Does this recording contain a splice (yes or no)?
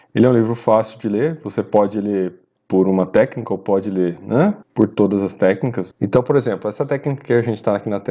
yes